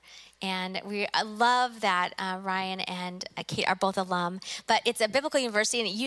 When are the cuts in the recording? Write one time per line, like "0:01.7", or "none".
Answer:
none